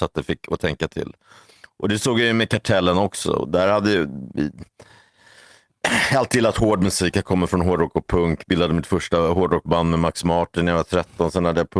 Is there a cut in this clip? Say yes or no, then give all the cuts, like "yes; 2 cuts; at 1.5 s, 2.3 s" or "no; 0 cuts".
no; 0 cuts